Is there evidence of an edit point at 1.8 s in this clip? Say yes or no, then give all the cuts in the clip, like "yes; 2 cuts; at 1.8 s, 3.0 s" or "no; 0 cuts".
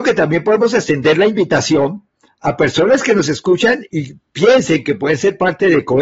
no; 1 cut; at 3.9 s